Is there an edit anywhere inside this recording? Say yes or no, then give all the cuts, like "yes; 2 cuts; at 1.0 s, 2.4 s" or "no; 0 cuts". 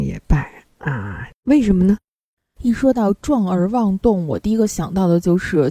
yes; 1 cut; at 1.3 s